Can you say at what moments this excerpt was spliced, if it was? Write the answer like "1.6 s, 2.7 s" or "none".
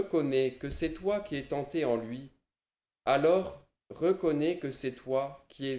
none